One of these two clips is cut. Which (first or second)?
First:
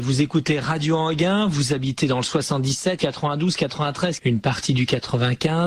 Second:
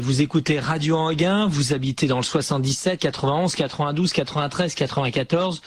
first